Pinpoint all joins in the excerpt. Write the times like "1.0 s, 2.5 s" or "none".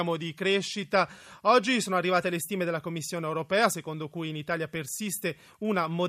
none